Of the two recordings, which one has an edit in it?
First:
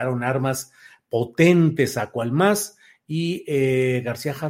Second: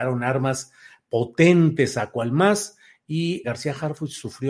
second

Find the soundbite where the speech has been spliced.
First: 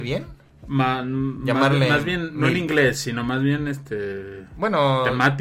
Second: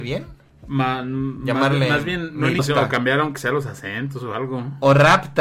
second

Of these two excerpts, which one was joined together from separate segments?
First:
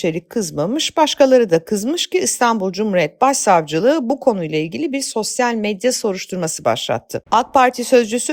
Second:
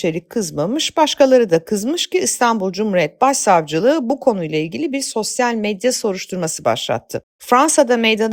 first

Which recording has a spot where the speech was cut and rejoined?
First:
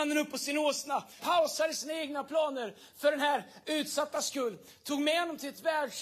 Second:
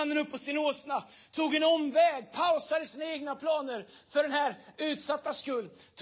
first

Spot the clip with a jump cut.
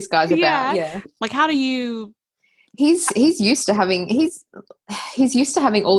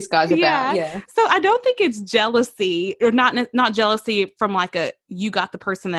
first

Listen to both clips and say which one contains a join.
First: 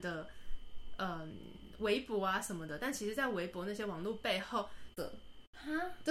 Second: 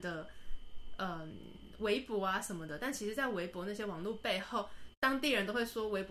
first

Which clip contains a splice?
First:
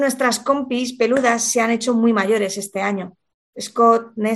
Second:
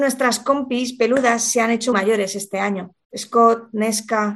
second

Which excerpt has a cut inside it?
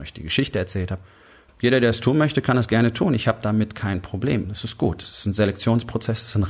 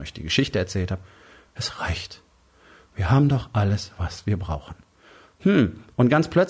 first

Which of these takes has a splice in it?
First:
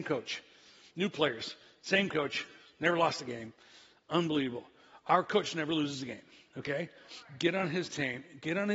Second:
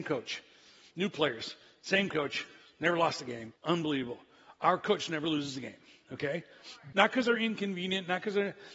second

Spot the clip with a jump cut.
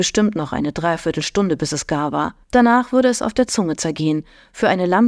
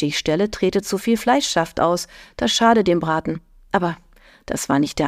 first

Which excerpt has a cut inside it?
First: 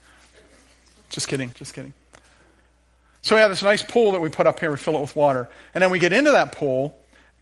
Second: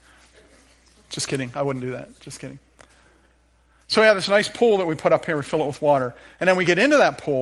first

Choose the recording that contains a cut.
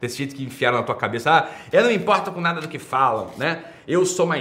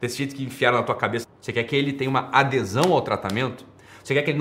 second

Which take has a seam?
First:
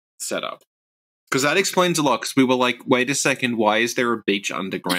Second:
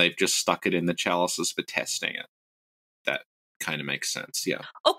second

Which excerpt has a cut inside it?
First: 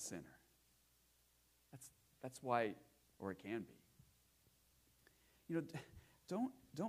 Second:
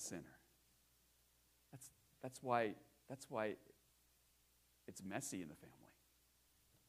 first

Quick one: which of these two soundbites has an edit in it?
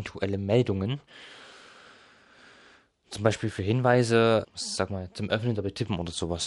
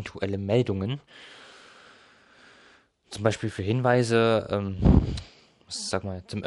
first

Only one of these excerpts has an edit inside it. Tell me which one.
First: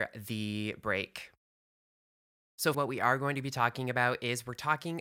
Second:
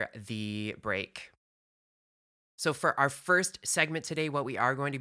first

